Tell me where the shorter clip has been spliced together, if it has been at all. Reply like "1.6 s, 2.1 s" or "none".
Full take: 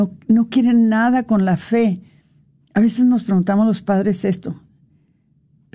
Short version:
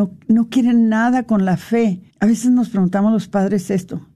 2.1 s